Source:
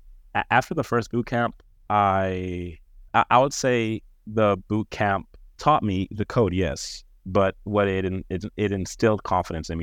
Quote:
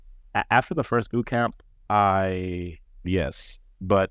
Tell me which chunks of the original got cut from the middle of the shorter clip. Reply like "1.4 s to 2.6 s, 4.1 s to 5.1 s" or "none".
3.0 s to 6.5 s